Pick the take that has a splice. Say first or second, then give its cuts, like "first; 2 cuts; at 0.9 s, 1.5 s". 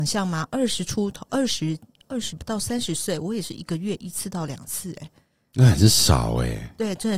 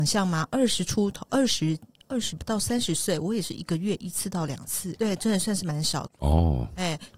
second; 2 cuts; at 5.0 s, 6.1 s